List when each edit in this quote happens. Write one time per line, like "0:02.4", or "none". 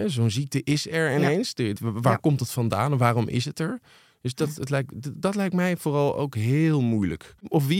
0:01.8